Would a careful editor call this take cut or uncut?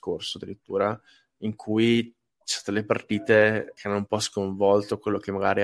cut